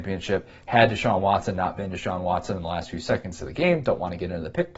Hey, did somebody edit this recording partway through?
no; 0 cuts

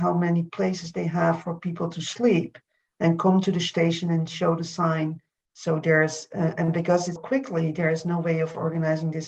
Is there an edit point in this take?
yes; 2 cuts; at 5.4 s, 7.2 s

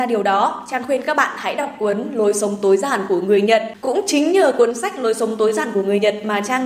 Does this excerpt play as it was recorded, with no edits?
yes; 0 cuts

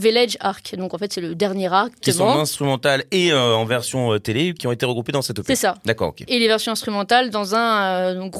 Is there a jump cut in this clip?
yes; 2 cuts; at 2.0 s, 6.3 s

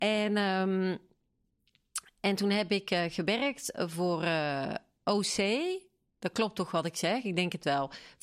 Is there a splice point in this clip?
no; 0 cuts

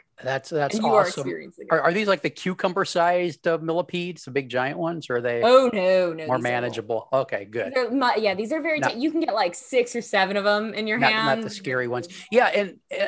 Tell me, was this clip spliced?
no; 0 cuts

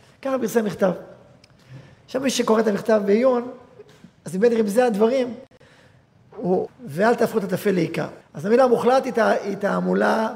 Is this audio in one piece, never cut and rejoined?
no; 2 cuts; at 6.7 s, 8.2 s

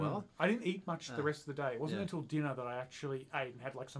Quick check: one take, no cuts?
yes; 0 cuts

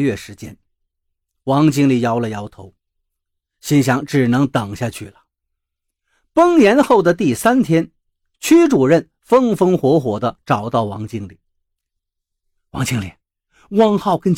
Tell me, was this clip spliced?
no; 0 cuts

